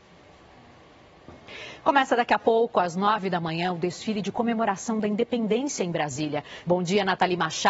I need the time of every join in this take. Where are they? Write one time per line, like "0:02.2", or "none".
0:06.6

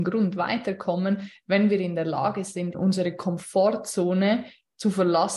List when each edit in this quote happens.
0:02.7

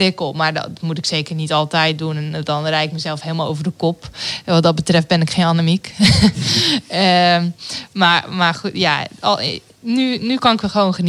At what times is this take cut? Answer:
none

